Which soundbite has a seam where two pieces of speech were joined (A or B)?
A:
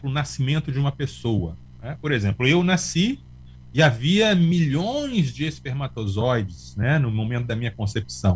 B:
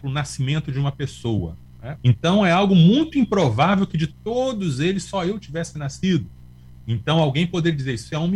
B